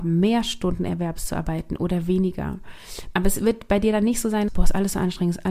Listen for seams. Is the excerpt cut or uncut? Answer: cut